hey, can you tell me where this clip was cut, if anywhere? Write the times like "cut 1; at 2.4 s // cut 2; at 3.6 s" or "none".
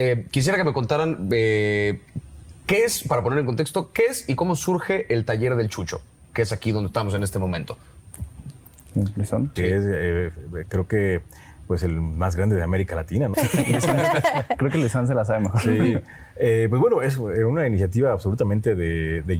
cut 1; at 9.6 s // cut 2; at 13.3 s